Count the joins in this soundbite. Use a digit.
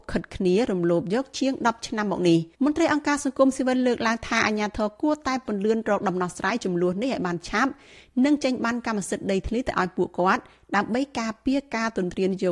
1